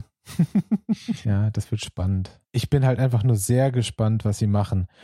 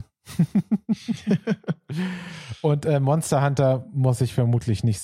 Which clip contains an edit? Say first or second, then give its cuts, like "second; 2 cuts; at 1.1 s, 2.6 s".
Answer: first; 2 cuts; at 1.2 s, 2.4 s